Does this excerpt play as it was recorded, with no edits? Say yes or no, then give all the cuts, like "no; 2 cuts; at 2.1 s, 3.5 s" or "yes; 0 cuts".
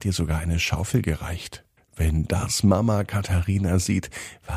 no; 1 cut; at 1.8 s